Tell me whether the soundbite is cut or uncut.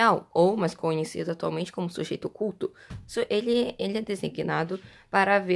uncut